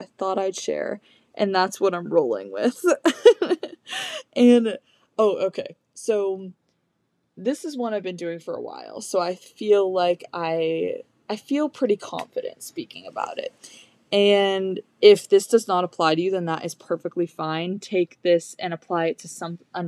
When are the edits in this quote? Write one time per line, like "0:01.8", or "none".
none